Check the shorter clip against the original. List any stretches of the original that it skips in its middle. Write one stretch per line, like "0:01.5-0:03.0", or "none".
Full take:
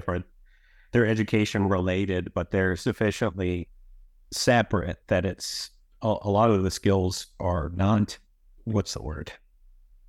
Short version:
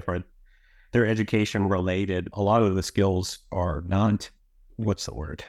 0:02.3-0:06.2